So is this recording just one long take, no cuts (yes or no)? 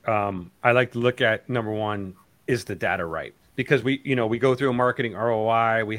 no